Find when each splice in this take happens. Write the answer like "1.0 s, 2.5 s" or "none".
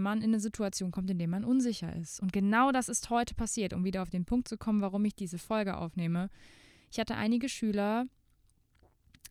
none